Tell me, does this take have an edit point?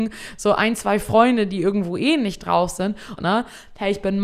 yes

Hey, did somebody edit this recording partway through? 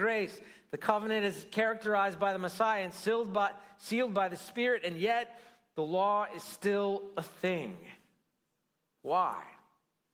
no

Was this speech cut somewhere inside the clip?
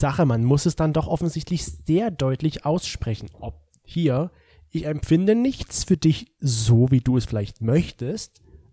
no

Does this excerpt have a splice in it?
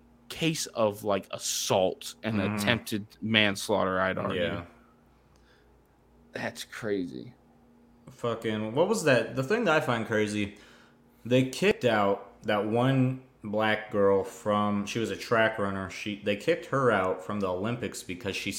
no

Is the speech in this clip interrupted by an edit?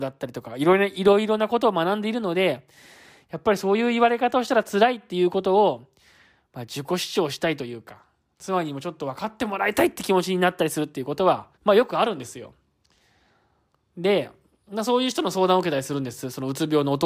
yes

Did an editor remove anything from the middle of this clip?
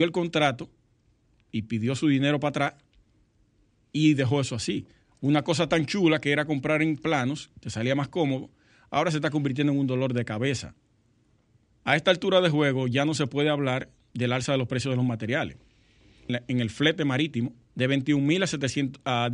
yes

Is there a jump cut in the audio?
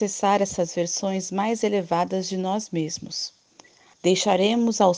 yes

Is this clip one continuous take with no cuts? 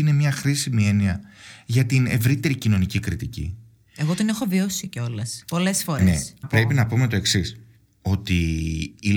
no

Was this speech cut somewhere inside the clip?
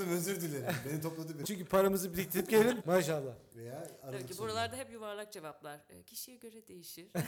yes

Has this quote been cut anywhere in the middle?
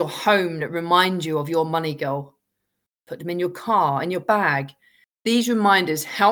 no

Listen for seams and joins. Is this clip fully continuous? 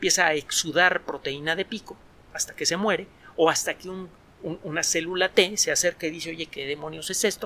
yes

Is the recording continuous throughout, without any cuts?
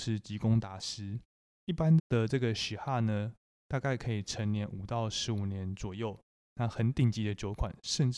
no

